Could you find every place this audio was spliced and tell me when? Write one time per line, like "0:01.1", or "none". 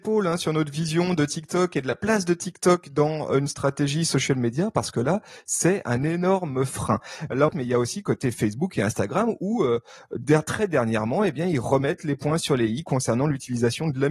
0:07.5